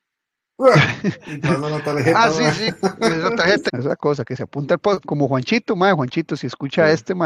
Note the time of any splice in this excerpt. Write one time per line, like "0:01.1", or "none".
0:03.7
0:05.0